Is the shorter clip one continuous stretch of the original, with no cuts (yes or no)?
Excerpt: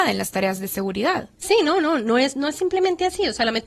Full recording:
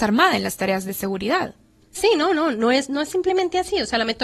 no